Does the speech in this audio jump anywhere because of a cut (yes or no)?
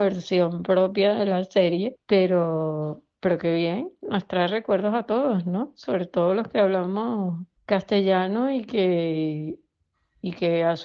no